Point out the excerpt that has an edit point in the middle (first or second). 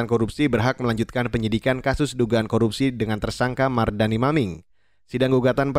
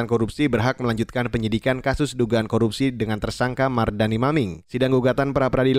second